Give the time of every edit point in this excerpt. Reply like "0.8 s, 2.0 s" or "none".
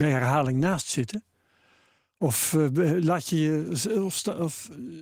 none